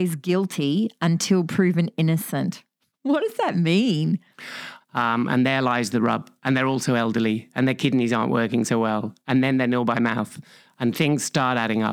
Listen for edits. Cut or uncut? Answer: cut